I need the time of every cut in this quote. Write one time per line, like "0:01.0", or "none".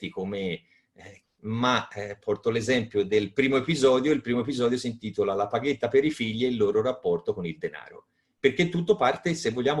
0:01.2